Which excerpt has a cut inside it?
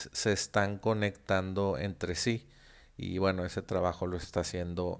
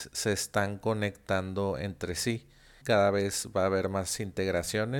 second; 1 cut; at 2.8 s

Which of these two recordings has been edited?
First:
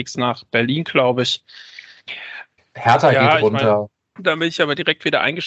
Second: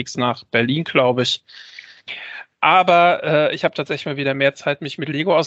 first; 2 cuts; at 2.6 s, 4.2 s

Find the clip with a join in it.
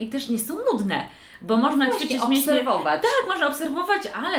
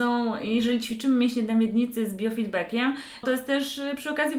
second; 1 cut; at 3.2 s

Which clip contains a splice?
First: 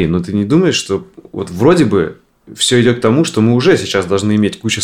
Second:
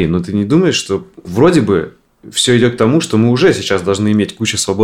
second; 1 cut; at 1.2 s

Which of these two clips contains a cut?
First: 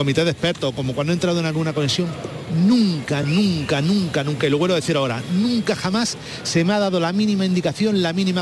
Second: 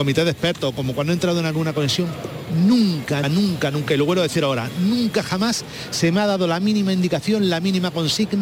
second; 1 cut; at 3.2 s

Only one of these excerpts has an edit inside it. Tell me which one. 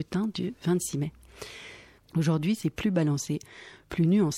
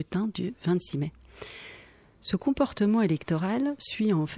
first; 1 cut; at 2.0 s

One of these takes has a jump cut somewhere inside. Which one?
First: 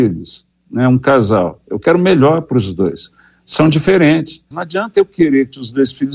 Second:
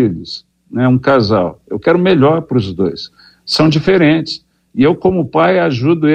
first; 1 cut; at 4.5 s

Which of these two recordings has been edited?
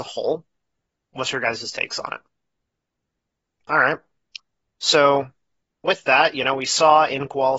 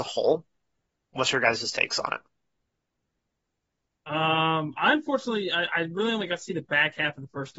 first; 1 cut; at 3.6 s

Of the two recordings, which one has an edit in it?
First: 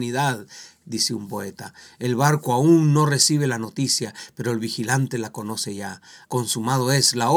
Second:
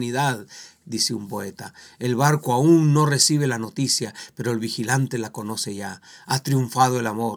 first; 1 cut; at 6.2 s

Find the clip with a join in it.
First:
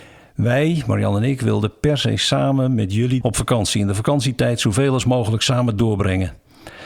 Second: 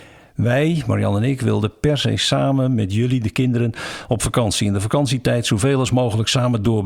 first; 1 cut; at 3.2 s

